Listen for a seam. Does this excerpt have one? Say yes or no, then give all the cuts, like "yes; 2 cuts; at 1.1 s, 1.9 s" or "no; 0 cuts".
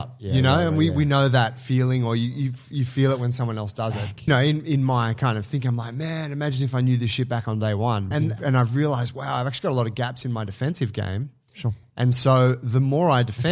yes; 2 cuts; at 4.3 s, 8.1 s